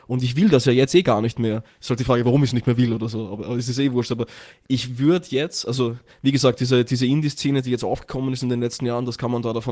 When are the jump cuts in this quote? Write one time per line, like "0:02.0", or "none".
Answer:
none